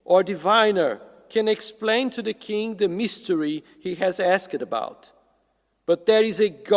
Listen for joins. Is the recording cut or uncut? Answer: uncut